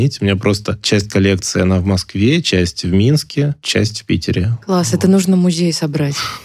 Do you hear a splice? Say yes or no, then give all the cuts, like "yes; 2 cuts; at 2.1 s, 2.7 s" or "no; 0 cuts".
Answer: no; 0 cuts